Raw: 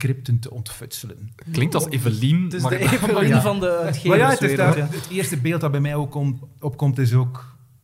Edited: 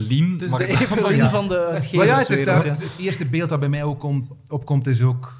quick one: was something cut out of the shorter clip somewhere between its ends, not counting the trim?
no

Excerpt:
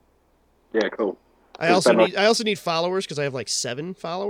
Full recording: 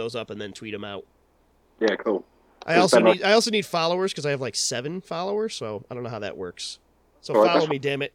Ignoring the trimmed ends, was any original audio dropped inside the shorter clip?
no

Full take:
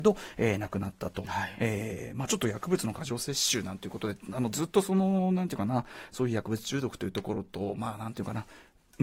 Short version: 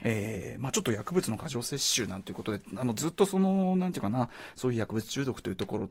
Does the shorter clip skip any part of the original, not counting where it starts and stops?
no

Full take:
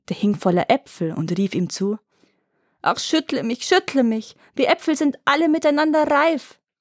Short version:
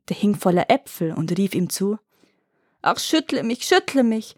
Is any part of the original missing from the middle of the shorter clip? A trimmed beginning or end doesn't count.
no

